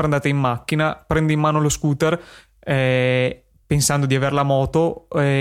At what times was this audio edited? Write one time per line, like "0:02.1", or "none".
none